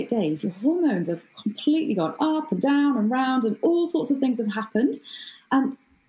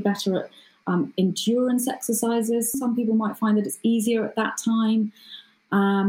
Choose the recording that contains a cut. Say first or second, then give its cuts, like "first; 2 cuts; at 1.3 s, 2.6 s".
second; 1 cut; at 2.7 s